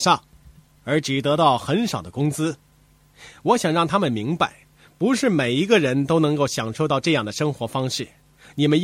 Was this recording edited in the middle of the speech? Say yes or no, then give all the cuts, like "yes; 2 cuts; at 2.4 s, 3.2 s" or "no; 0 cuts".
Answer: no; 0 cuts